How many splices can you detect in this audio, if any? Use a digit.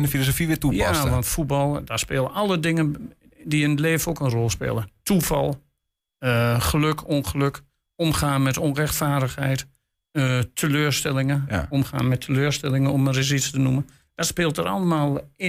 0